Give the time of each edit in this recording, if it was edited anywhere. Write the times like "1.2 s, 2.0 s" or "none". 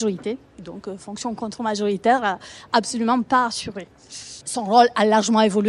4.4 s